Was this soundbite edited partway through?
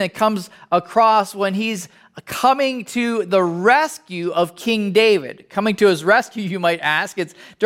no; 0 cuts

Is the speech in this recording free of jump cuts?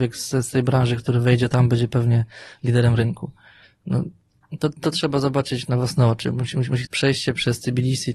no; 2 cuts; at 3.6 s, 6.8 s

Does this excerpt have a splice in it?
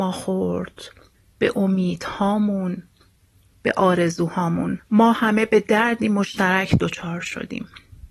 no; 0 cuts

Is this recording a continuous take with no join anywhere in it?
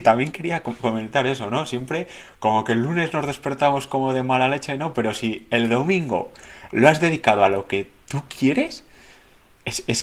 yes; 0 cuts

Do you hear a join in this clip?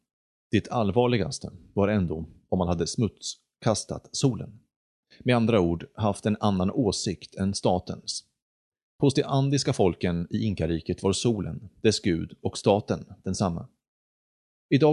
no; 0 cuts

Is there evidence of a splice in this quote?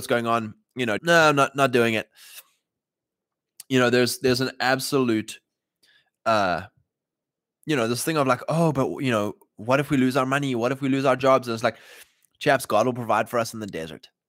yes; 1 cut; at 1.0 s

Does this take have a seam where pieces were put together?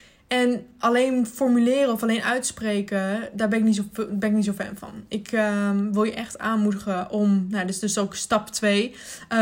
no; 0 cuts

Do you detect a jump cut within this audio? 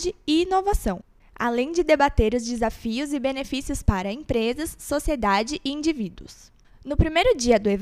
no; 0 cuts

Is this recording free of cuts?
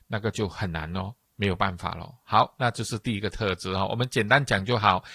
yes; 0 cuts

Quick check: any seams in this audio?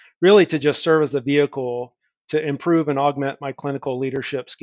no; 0 cuts

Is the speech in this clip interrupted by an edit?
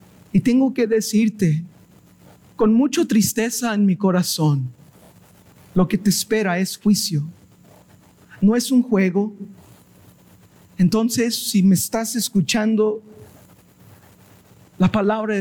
no; 0 cuts

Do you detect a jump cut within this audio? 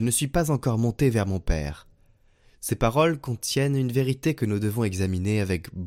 no; 0 cuts

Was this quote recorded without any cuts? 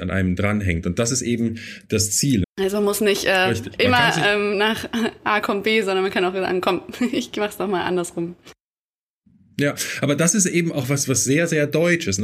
no; 1 cut; at 2.4 s

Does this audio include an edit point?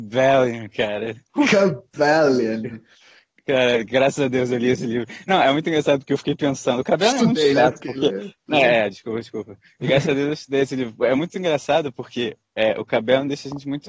no; 0 cuts

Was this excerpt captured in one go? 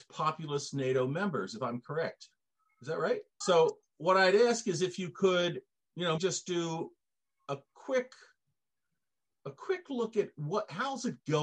no; 2 cuts; at 3.4 s, 6.2 s

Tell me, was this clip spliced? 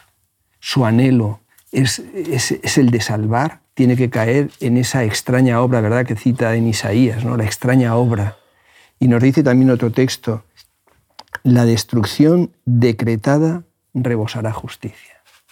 yes; 1 cut; at 3.7 s

